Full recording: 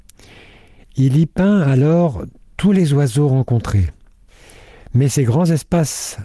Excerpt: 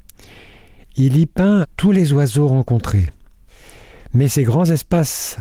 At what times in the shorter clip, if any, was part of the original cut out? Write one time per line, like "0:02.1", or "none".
0:01.6